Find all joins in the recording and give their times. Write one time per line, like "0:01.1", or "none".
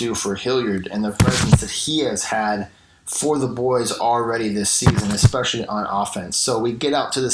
none

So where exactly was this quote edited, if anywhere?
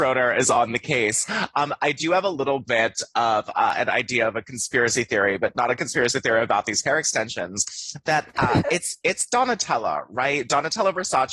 none

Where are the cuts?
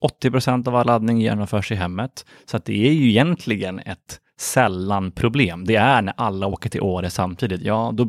none

